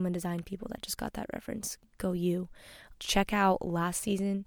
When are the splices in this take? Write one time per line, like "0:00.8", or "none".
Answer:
0:02.9

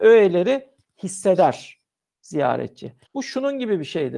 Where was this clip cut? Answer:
0:03.1

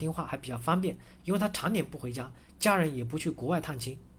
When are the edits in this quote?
0:01.2

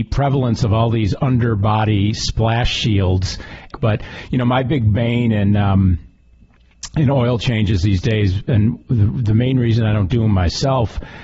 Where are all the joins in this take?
0:03.7

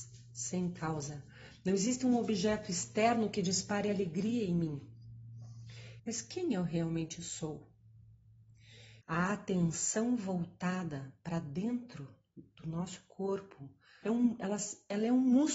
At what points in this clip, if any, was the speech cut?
0:06.0
0:09.0
0:14.0

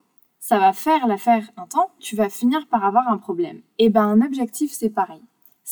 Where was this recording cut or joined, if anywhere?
0:02.0

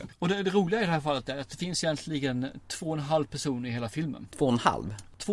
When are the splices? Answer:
none

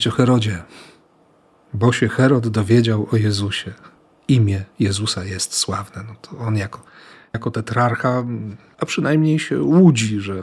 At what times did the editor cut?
0:08.7

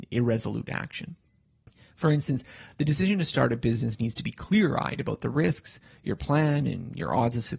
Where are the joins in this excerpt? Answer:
none

